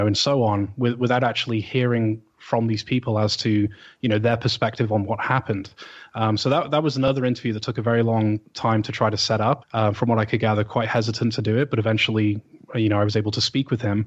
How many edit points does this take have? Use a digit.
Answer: 1